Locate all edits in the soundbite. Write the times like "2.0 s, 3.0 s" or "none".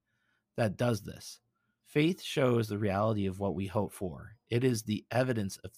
1.8 s